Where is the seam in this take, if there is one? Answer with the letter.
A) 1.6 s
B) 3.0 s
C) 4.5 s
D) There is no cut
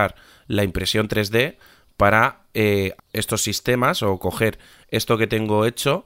B